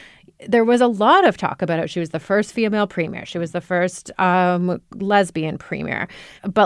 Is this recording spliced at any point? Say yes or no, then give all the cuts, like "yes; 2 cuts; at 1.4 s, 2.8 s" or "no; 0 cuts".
no; 0 cuts